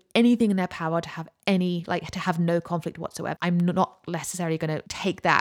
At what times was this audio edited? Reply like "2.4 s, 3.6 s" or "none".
3.4 s